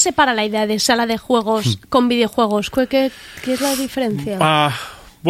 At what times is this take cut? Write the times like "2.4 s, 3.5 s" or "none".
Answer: none